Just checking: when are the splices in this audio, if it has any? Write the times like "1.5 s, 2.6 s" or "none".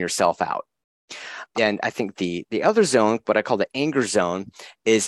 2.5 s